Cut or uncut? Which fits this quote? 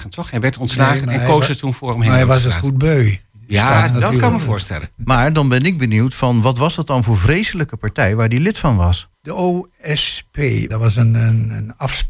cut